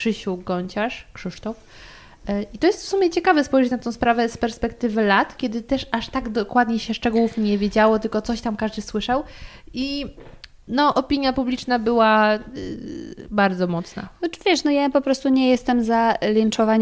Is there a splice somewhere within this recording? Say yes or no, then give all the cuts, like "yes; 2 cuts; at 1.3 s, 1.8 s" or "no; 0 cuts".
no; 0 cuts